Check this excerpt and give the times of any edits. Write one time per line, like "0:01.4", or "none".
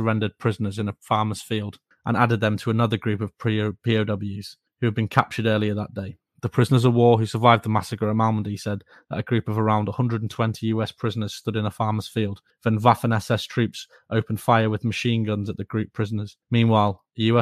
0:16.4